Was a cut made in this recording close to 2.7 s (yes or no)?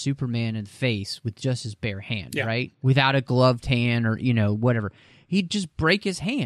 yes